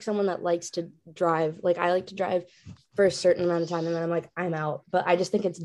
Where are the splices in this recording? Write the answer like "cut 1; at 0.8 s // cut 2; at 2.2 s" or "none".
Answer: none